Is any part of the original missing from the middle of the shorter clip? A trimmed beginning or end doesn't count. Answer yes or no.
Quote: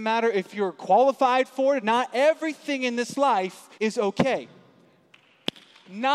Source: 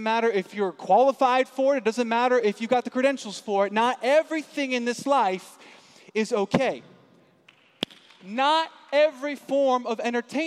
yes